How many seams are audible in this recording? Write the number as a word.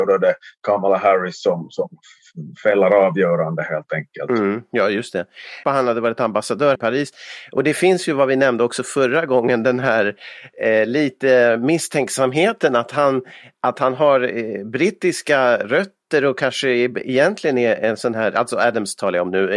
two